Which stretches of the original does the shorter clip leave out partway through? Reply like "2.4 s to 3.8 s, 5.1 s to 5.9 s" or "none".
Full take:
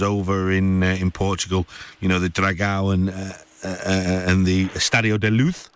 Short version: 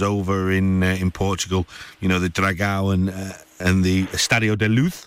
3.6 s to 4.2 s